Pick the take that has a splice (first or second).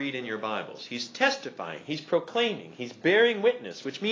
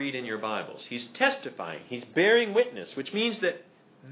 second